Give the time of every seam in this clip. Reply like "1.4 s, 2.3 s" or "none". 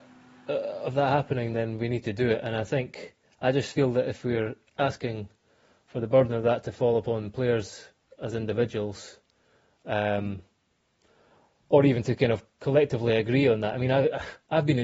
none